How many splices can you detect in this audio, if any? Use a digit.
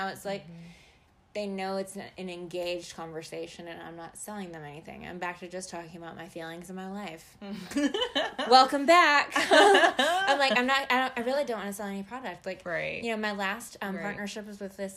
0